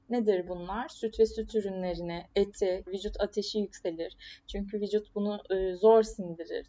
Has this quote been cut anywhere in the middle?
yes; 1 cut; at 2.9 s

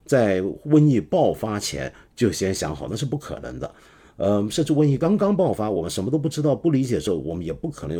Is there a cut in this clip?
no; 0 cuts

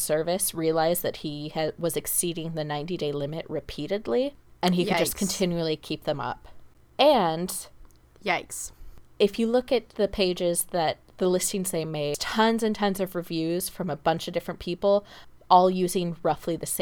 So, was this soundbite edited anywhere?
no; 0 cuts

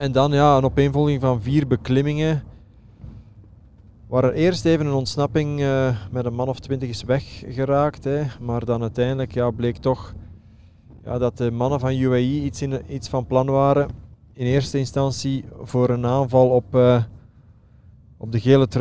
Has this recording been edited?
no; 0 cuts

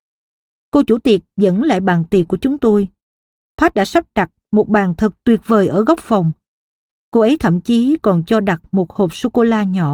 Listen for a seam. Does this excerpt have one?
no; 0 cuts

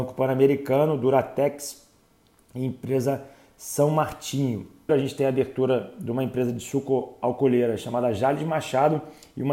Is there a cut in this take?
yes; 1 cut; at 4.9 s

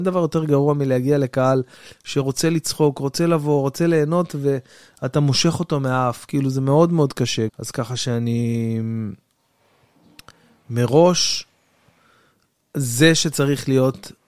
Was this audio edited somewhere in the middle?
yes; 1 cut; at 7.5 s

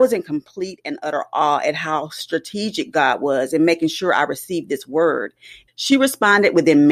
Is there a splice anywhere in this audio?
yes; 1 cut; at 5.7 s

